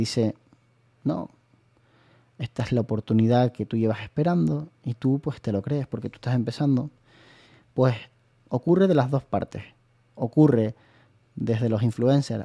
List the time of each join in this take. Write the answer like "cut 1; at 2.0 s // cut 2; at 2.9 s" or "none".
none

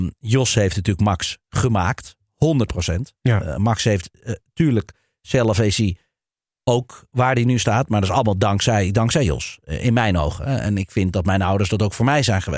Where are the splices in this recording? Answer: none

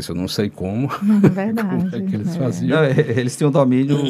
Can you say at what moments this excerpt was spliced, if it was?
cut 1; at 3.0 s

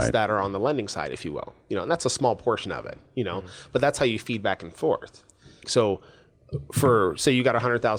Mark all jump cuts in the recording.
cut 1; at 5.6 s

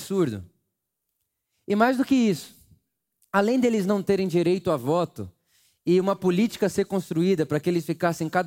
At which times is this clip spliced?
none

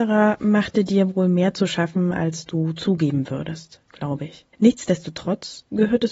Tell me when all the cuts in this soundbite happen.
none

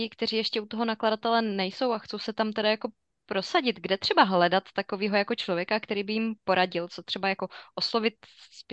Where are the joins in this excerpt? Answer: none

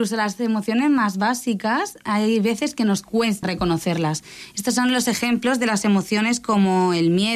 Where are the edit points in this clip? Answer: cut 1; at 3.4 s

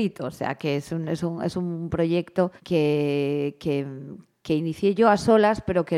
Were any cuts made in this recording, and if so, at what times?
cut 1; at 2.6 s

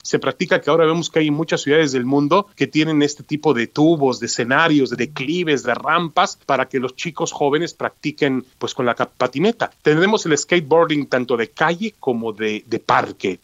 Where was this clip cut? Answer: none

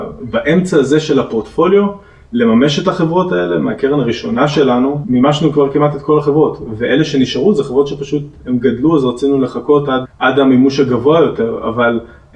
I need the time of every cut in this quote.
cut 1; at 10.0 s

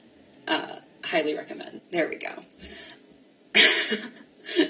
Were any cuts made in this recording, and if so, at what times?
cut 1; at 1.8 s

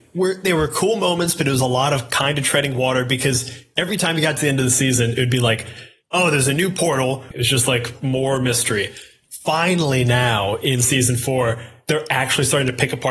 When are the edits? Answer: cut 1; at 7.3 s

